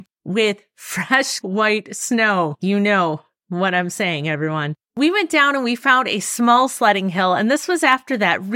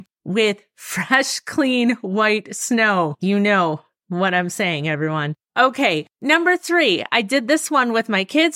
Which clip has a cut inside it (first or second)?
first